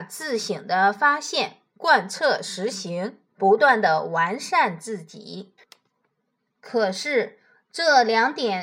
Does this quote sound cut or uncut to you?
cut